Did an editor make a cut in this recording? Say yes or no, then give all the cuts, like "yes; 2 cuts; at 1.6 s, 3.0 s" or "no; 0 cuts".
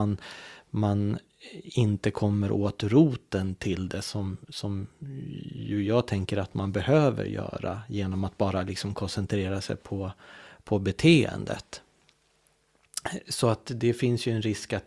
no; 0 cuts